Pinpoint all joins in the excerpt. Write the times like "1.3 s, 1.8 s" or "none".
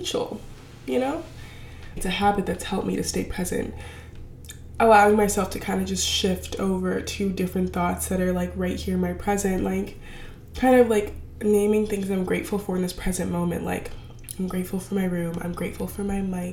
2.0 s